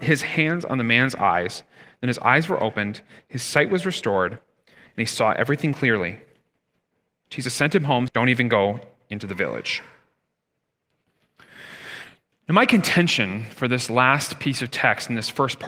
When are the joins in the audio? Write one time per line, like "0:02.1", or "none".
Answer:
0:08.1